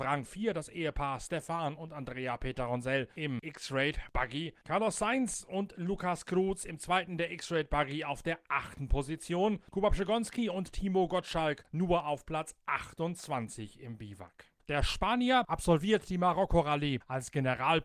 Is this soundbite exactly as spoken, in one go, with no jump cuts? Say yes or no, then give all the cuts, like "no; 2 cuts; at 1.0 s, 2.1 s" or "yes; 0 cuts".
no; 1 cut; at 14.6 s